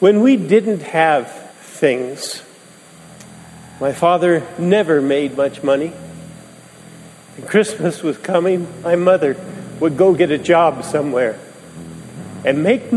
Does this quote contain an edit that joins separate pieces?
yes; 1 cut; at 1.5 s

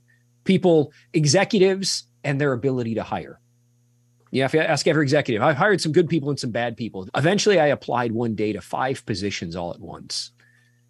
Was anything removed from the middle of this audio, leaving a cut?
yes; 1 cut; at 7.1 s

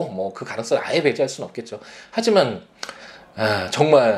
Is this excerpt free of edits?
yes; 0 cuts

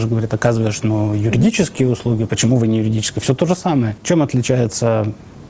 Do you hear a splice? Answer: no; 0 cuts

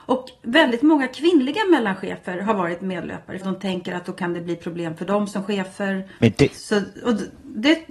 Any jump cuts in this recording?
yes; 2 cuts; at 3.4 s, 6.2 s

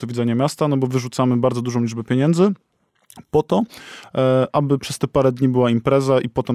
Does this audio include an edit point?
no; 0 cuts

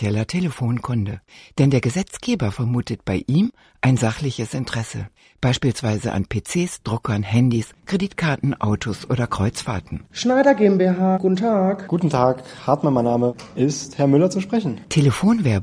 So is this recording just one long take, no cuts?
yes; 0 cuts

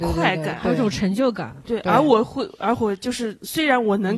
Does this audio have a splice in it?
no; 0 cuts

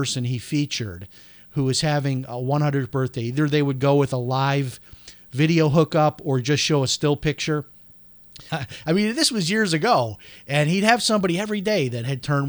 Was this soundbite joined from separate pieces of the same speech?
yes; 1 cut; at 8.5 s

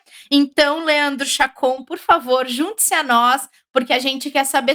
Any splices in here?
no; 0 cuts

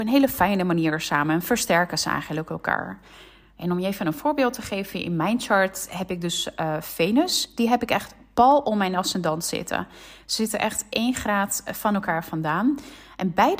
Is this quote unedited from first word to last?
yes; 0 cuts

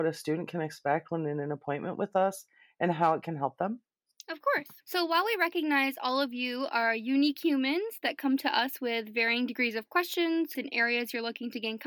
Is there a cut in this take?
yes; 2 cuts; at 4.8 s, 10.5 s

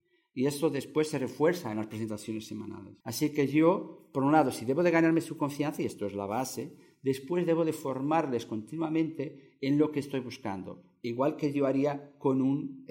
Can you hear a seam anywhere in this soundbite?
yes; 1 cut; at 3.0 s

